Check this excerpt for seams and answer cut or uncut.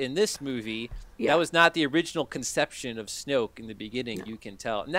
uncut